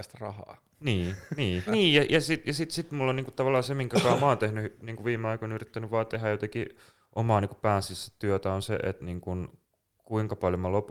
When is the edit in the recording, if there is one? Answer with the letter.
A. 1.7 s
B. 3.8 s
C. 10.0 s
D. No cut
A